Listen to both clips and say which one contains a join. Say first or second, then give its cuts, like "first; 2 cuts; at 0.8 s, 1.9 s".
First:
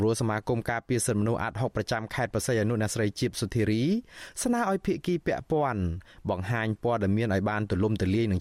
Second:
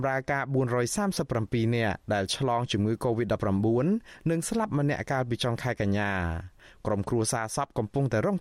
second; 1 cut; at 2.0 s